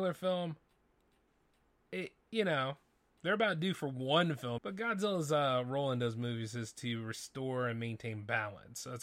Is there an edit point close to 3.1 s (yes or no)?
no